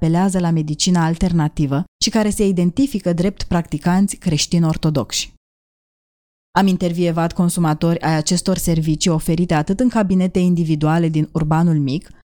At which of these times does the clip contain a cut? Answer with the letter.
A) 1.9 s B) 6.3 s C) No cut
A